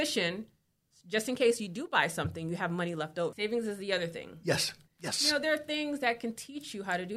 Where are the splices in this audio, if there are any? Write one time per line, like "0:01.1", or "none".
0:03.3
0:04.9